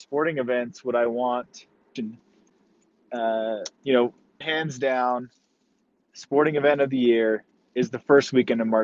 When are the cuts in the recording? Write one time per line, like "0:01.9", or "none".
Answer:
0:02.0
0:04.4